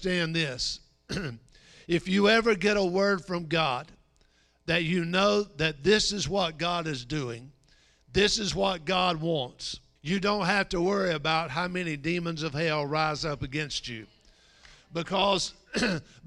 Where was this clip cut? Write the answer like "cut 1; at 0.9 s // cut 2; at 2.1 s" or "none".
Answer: cut 1; at 10.0 s

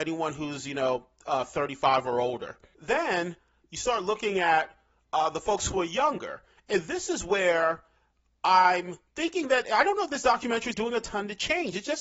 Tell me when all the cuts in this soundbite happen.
cut 1; at 9.1 s // cut 2; at 10.7 s

